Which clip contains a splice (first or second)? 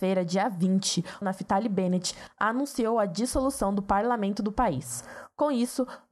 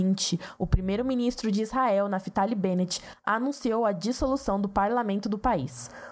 first